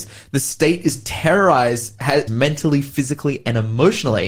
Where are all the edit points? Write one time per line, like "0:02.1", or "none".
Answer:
0:02.3